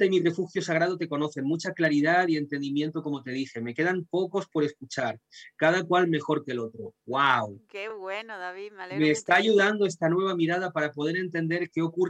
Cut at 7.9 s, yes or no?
no